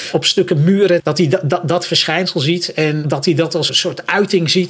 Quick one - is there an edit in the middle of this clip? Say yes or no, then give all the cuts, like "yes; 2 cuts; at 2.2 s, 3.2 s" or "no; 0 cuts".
yes; 1 cut; at 1.0 s